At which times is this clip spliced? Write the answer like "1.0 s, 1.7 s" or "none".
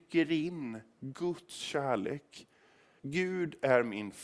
3.0 s